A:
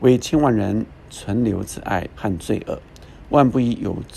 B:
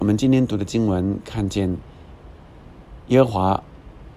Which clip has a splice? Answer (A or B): A